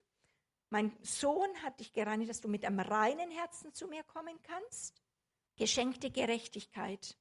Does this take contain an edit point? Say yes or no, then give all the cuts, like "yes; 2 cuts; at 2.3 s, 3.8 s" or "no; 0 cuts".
yes; 1 cut; at 5.5 s